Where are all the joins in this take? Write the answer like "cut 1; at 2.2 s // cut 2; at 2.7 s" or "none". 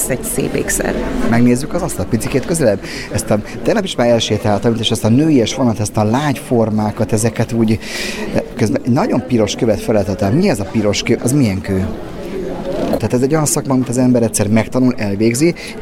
cut 1; at 11.2 s // cut 2; at 13.0 s